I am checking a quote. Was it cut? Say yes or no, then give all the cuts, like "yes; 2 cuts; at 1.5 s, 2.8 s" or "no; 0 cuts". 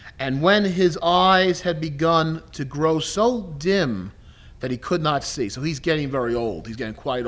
no; 0 cuts